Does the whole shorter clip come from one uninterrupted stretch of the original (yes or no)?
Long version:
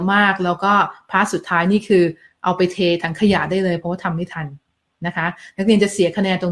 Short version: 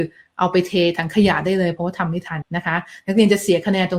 no